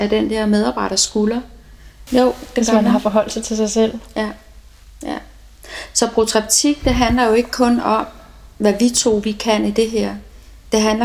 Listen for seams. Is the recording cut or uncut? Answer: cut